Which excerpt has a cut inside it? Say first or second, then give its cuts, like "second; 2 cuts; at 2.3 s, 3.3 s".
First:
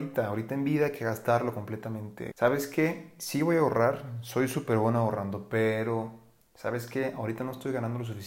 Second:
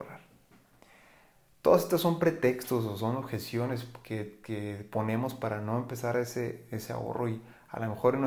first; 1 cut; at 2.3 s